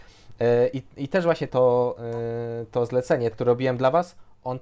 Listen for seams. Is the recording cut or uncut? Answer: cut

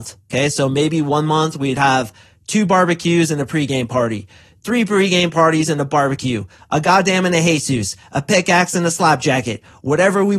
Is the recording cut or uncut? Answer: uncut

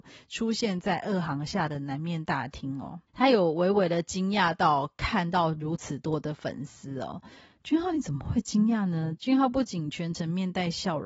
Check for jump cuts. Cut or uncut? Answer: cut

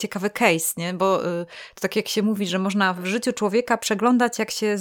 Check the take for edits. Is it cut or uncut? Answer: uncut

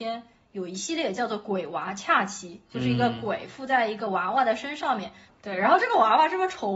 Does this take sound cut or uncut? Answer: uncut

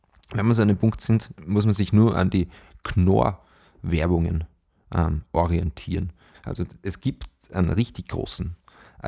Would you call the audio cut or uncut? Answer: cut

